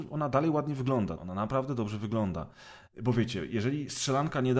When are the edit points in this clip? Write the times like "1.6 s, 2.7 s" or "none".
1.2 s, 2.9 s